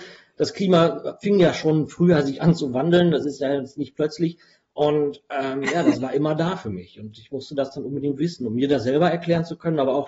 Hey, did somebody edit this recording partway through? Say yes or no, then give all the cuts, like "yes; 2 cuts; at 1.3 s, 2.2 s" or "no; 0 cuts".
no; 0 cuts